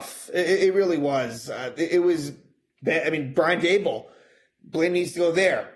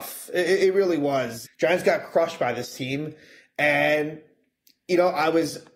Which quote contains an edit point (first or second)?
second